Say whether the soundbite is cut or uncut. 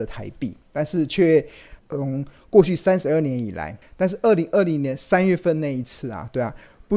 cut